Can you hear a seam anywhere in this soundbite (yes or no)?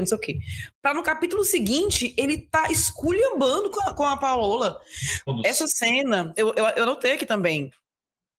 yes